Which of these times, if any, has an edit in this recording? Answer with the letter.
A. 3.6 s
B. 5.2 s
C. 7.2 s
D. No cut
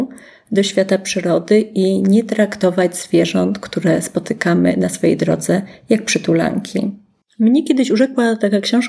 C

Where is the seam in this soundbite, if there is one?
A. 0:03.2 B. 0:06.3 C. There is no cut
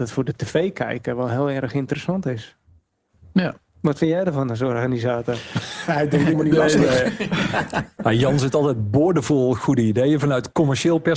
B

